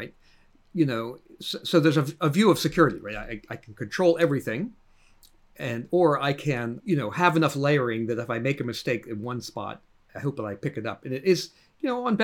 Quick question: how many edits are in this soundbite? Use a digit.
2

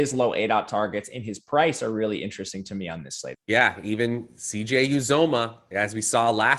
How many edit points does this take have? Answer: 1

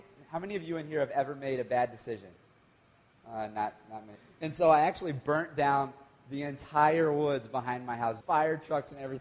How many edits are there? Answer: 2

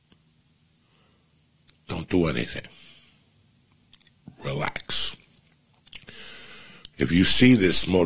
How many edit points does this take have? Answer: 1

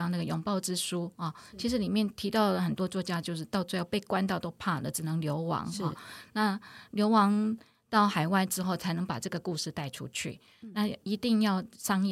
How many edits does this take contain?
0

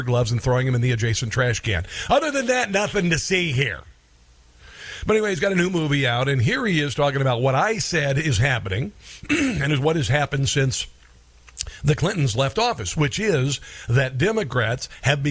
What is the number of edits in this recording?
0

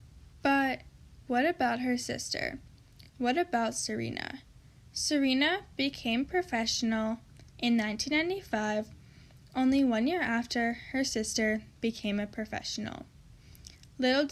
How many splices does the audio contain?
0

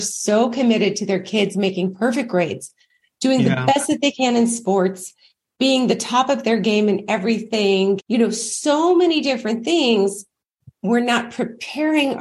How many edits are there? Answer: 1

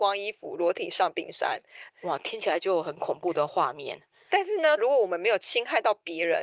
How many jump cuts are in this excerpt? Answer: 2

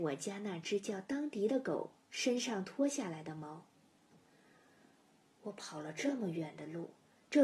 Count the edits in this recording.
0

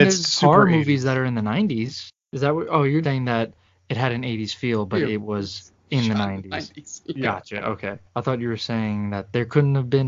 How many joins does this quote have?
2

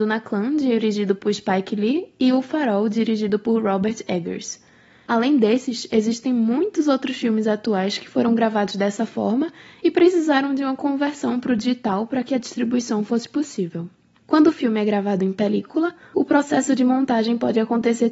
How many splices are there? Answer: 0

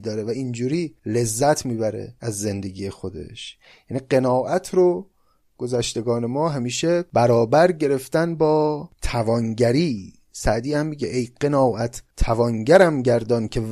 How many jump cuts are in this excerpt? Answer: 2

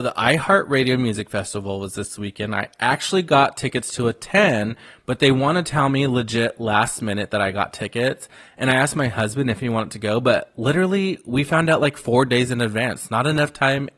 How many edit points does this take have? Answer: 0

